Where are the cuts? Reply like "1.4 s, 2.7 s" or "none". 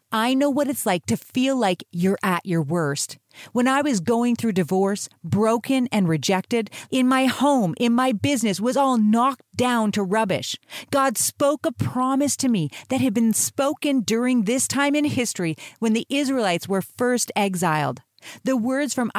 6.9 s